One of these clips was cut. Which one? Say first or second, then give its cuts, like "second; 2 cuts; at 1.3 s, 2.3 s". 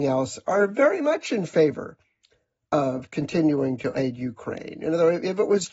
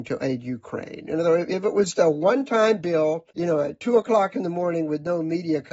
second; 2 cuts; at 1.9 s, 3.3 s